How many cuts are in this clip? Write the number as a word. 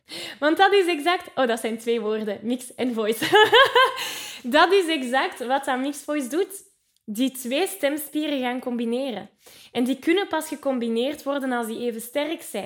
zero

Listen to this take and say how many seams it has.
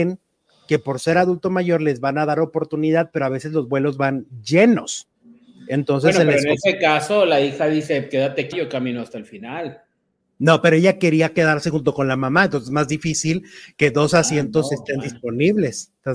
one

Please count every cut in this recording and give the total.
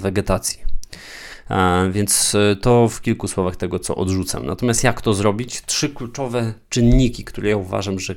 zero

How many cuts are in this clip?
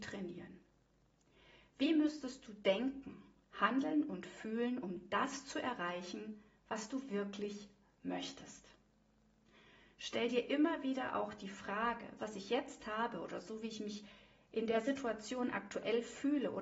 one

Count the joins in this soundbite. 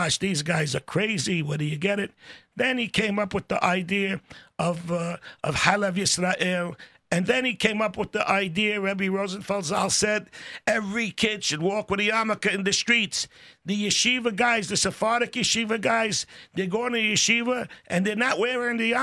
zero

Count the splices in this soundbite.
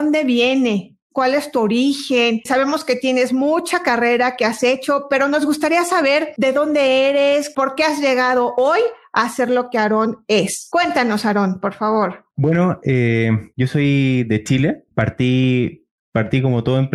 zero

